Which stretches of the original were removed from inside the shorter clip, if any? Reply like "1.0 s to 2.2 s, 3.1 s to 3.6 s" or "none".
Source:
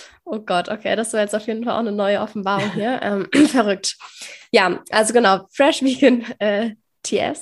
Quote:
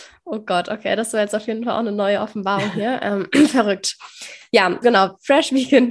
4.8 s to 5.1 s